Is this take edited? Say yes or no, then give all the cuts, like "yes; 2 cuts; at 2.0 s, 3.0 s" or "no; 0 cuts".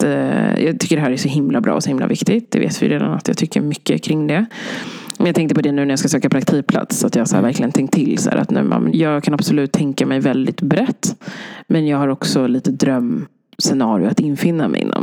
yes; 1 cut; at 8.9 s